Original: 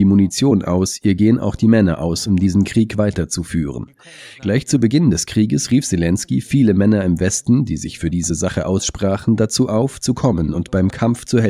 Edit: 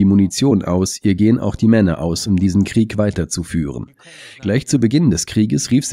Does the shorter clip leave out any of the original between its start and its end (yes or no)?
no